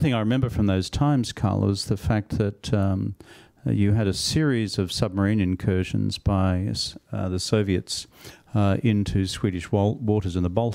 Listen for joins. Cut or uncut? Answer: uncut